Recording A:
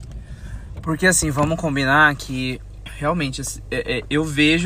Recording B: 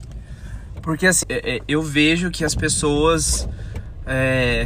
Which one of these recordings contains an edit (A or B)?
B